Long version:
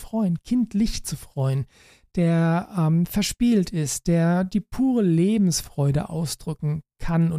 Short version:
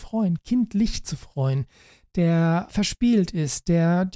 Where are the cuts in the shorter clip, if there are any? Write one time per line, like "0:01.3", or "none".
0:02.7